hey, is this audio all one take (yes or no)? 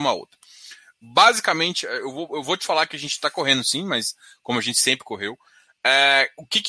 no